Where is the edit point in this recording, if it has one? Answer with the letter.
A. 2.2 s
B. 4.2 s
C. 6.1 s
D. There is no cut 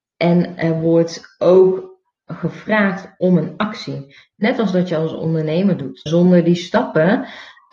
C